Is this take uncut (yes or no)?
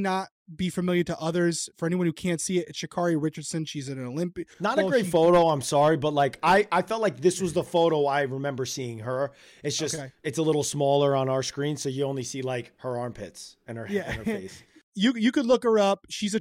yes